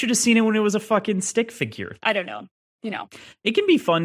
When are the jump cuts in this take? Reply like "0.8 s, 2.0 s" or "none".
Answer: 2.0 s